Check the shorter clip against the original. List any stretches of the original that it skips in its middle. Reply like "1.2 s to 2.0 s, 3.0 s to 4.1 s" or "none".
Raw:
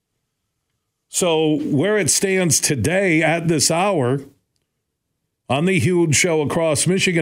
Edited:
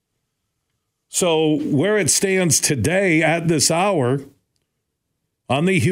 none

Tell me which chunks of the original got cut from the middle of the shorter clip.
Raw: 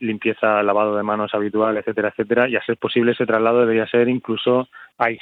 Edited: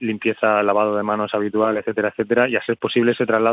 none

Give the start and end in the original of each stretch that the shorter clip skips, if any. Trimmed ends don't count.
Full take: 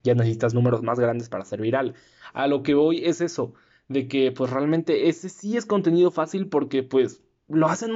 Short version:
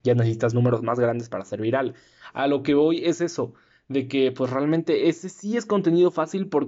none

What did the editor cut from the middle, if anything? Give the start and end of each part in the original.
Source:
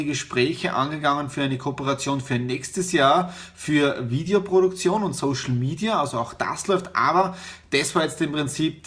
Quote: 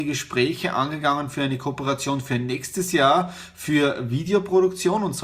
none

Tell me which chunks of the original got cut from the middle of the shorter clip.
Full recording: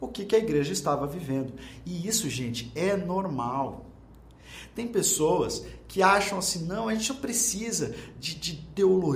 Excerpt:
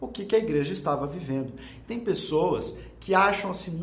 1.8 s to 4.7 s

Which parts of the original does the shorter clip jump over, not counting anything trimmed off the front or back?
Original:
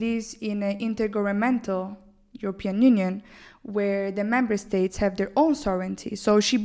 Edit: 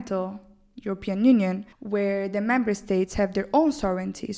3.3 s to 3.6 s

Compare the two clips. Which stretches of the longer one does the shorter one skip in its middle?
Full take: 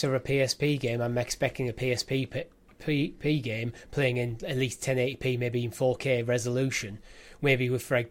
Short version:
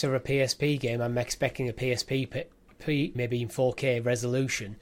3.1 s to 5.4 s

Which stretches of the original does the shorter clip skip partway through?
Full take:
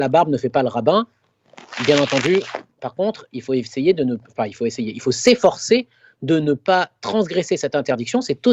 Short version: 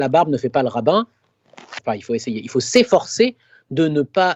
1.8 s to 4.3 s

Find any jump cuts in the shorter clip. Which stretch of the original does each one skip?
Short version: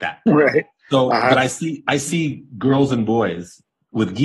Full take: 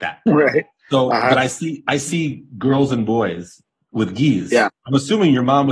none

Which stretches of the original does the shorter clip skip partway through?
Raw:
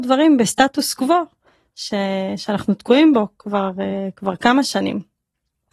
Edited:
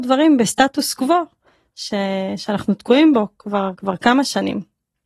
3.7 s to 4.1 s

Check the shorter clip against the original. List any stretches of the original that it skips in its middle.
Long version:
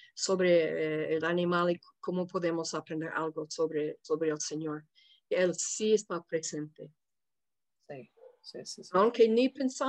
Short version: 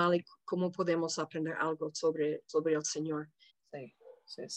5.1 s to 7.7 s

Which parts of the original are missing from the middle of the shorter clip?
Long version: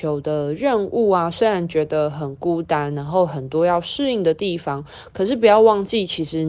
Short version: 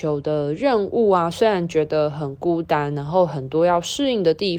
none

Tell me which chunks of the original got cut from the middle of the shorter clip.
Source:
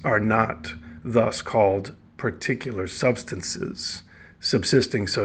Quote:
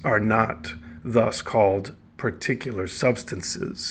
none

